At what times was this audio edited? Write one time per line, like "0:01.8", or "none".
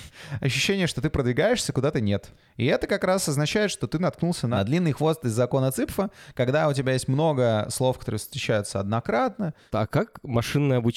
none